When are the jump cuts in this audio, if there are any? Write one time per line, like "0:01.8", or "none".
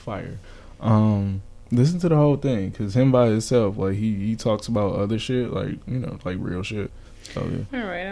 none